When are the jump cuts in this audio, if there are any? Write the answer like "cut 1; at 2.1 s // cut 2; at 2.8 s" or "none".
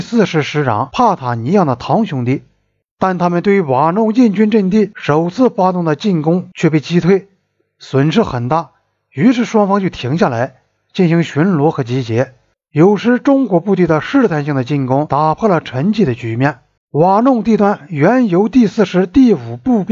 cut 1; at 2.9 s // cut 2; at 16.8 s